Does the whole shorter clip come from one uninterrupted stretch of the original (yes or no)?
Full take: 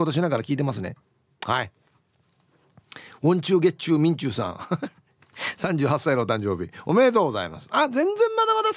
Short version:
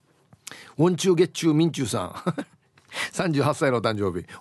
yes